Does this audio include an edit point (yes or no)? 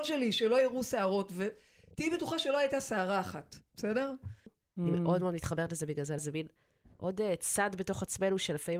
yes